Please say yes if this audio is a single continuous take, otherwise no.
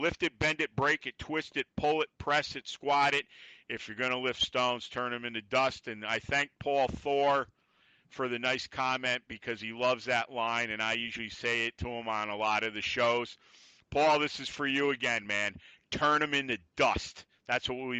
yes